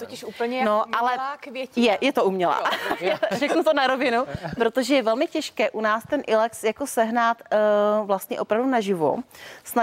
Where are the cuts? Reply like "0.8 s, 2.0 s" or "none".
none